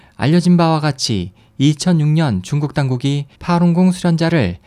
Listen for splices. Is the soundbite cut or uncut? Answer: cut